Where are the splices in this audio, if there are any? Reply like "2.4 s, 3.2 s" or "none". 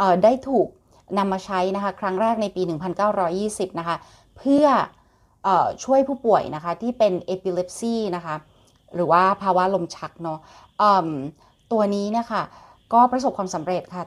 none